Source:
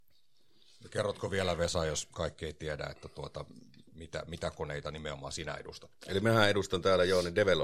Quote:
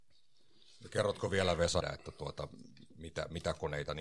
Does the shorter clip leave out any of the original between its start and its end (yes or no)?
yes